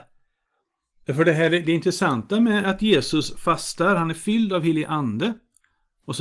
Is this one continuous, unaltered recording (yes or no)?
yes